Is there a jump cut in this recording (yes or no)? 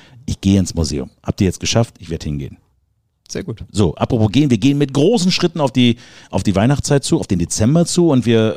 no